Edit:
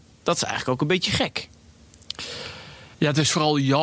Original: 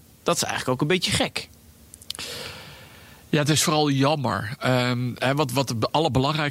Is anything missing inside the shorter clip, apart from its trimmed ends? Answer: yes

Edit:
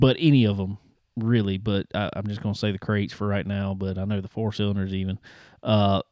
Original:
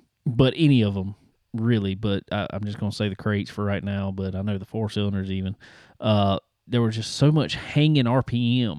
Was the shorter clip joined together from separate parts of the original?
no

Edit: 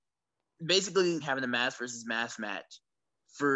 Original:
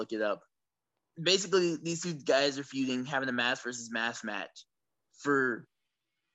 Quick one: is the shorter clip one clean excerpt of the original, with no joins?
no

